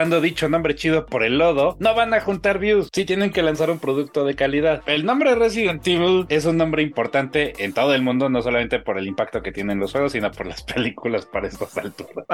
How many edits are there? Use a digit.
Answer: 0